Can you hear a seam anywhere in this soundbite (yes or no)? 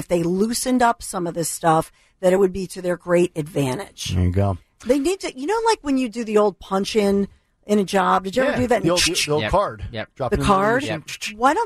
no